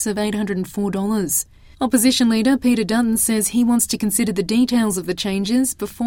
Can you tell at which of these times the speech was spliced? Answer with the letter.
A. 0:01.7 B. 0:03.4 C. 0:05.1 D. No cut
A